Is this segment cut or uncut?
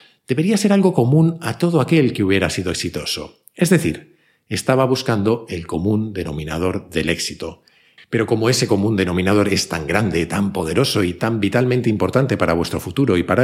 cut